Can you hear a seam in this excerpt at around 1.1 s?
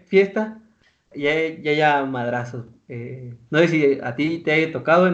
yes; 1 cut; at 1.1 s

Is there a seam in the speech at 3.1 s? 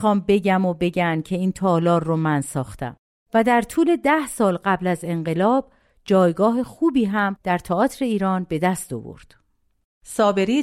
yes; 1 cut; at 3.1 s

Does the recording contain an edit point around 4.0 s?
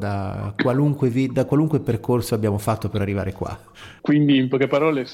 yes; 1 cut; at 4.0 s

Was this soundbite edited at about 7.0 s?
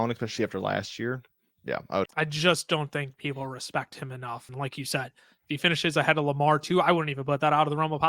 no; 2 cuts; at 2.1 s, 4.5 s

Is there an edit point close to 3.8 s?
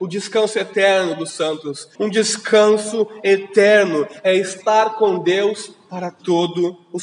no; 1 cut; at 1.9 s

